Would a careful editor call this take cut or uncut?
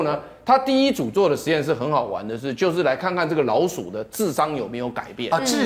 uncut